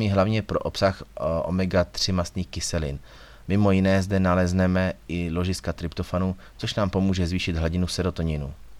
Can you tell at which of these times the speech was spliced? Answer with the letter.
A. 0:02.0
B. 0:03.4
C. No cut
B